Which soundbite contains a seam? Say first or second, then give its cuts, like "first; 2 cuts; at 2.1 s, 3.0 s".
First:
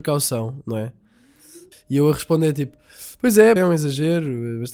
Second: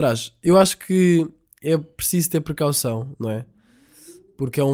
first; 2 cuts; at 1.7 s, 3.6 s